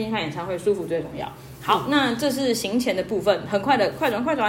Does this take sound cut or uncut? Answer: uncut